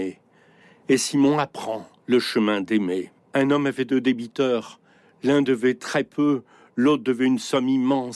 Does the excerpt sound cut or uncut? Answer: cut